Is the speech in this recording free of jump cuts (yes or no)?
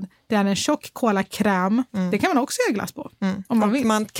yes